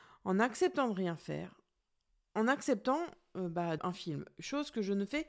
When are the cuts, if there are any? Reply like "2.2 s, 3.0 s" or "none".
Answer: 3.8 s

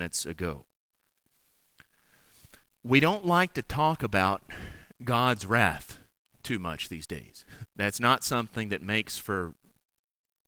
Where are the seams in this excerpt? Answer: 7.7 s

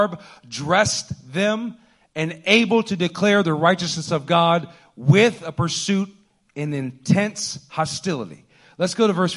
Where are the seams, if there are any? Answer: none

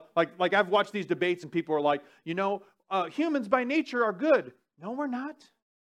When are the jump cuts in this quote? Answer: none

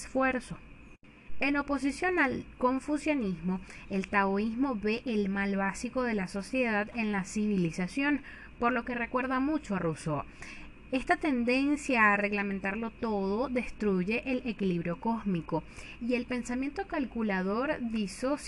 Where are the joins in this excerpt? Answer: none

